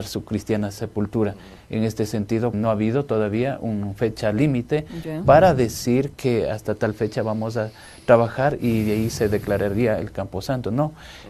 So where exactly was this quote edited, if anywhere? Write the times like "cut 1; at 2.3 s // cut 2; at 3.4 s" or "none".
cut 1; at 2.5 s